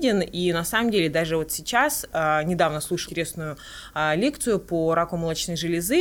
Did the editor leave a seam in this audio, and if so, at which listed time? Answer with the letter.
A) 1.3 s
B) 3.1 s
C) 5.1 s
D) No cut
B